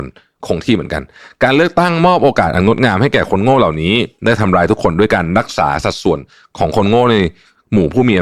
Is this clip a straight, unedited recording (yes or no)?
yes